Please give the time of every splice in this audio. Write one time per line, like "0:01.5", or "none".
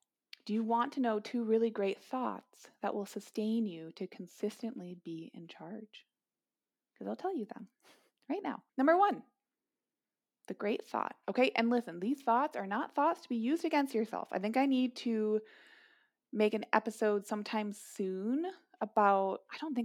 0:08.7